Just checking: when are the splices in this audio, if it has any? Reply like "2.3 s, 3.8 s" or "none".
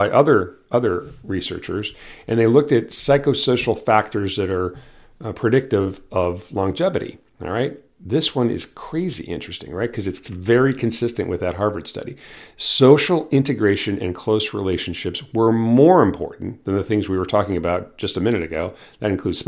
none